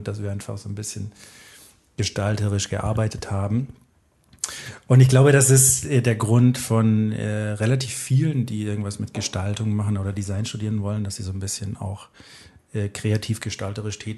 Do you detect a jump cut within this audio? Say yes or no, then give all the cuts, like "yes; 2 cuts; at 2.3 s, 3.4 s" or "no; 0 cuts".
no; 0 cuts